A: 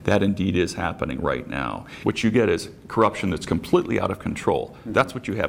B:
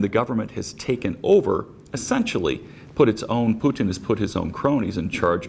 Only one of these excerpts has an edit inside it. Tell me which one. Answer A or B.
A